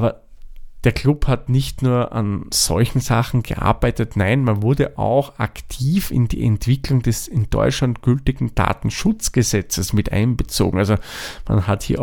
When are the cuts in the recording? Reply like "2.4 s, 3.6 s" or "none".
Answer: none

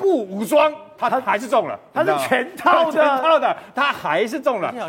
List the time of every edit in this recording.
none

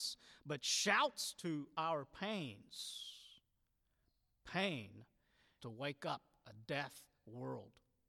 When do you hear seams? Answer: 5.6 s

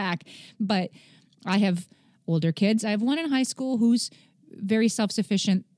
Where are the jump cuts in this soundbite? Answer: none

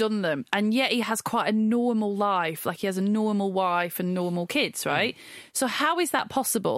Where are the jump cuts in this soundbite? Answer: none

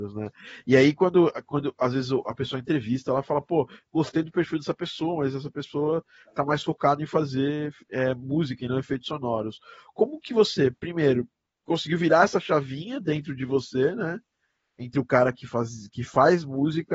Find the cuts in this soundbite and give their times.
none

